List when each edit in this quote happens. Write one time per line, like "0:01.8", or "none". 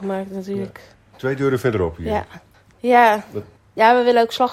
0:01.1
0:02.7